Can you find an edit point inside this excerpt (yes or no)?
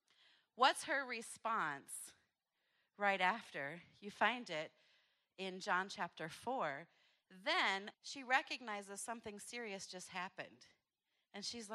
yes